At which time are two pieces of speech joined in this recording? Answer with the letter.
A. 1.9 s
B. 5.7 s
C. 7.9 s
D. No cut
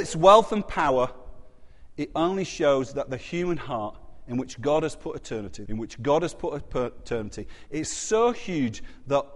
B